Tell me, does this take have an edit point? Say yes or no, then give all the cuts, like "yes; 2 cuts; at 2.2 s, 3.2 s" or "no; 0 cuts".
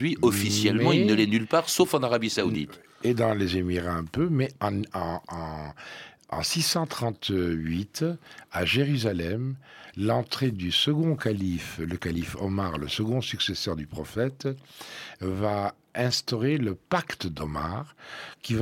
no; 0 cuts